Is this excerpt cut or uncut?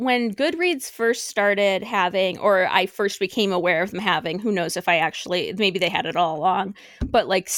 uncut